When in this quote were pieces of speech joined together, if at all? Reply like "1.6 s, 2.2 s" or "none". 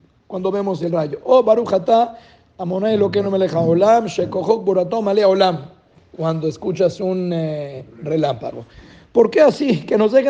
none